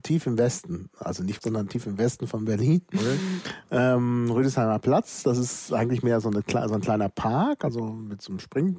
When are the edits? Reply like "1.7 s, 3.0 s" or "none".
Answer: 1.4 s